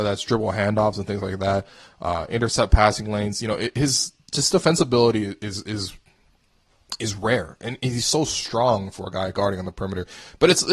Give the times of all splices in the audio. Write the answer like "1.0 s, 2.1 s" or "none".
none